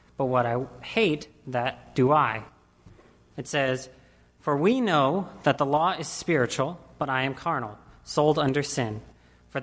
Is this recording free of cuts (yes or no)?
no